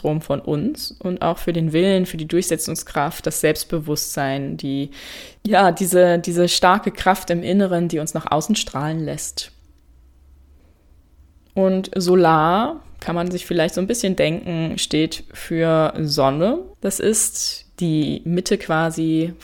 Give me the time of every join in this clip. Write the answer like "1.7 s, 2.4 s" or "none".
16.7 s